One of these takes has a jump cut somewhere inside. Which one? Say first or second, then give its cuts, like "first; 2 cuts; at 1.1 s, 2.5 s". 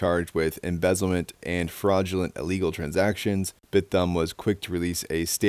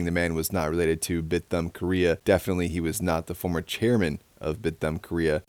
first; 1 cut; at 1.4 s